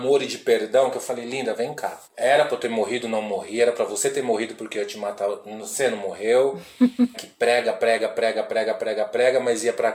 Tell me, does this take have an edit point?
yes; 3 cuts; at 2.0 s, 7.1 s, 8.4 s

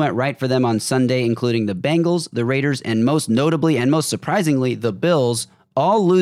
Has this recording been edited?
no; 0 cuts

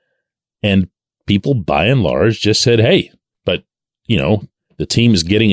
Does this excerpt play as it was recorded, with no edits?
no; 1 cut; at 3.3 s

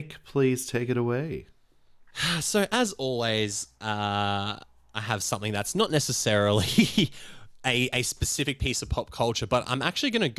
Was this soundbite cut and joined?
no; 0 cuts

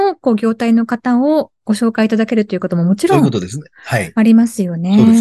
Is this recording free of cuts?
yes; 0 cuts

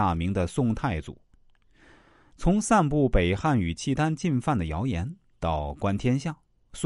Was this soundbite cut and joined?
no; 0 cuts

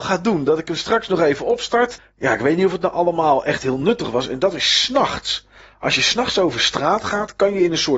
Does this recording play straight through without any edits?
no; 1 cut; at 2.0 s

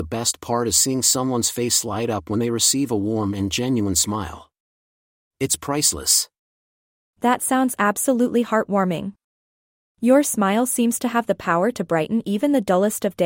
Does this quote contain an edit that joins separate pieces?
no; 0 cuts

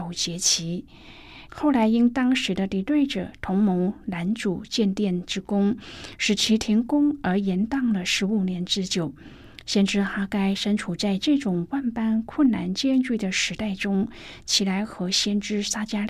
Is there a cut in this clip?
yes; 2 cuts; at 1.5 s, 14.4 s

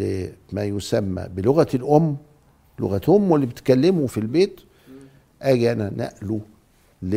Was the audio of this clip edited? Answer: yes; 1 cut; at 4.1 s

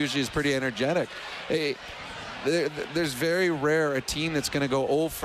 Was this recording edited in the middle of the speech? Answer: no; 0 cuts

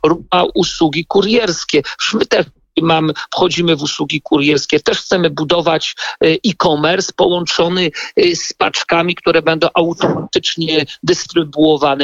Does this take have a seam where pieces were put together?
no; 0 cuts

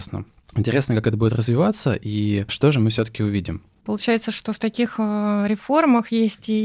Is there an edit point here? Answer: no; 0 cuts

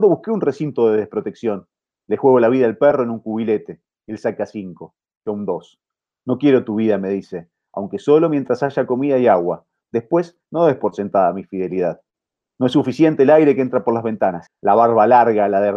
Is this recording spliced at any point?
yes; 1 cut; at 14.5 s

